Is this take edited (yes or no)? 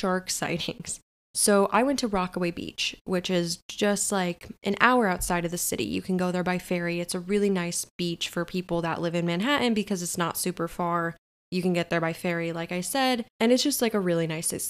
no